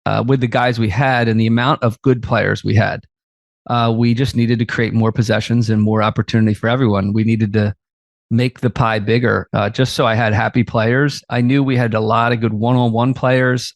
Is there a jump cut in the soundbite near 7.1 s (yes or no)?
no